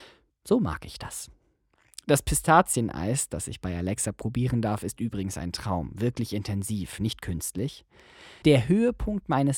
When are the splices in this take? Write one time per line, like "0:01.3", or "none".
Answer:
0:08.4

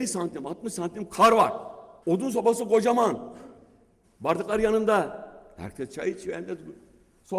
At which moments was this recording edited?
0:02.0
0:04.0

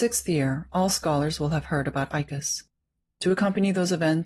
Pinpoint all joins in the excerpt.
none

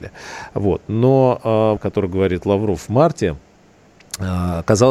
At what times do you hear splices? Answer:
0:01.8

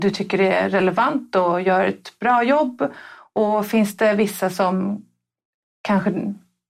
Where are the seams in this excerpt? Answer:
none

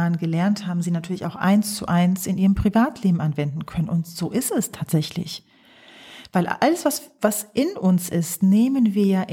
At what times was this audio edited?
none

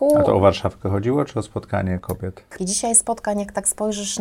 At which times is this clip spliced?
0:02.6

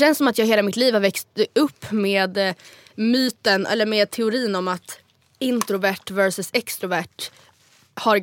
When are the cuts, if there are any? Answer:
none

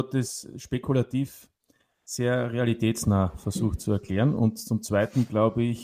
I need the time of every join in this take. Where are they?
none

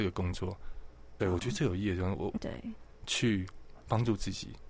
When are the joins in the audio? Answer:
0:01.2
0:02.4

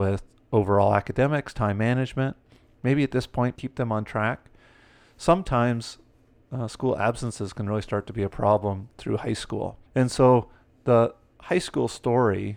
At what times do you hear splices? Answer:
0:03.5
0:09.9

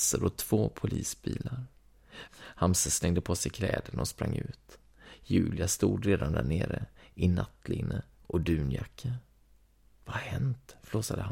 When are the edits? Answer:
0:02.3

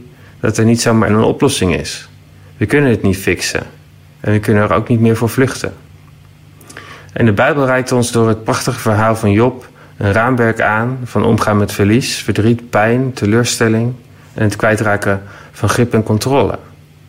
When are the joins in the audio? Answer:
0:01.1

